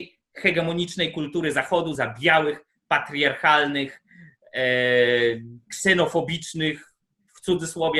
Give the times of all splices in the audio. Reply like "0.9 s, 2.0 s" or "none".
none